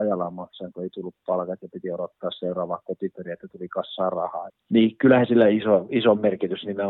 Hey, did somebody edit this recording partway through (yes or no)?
yes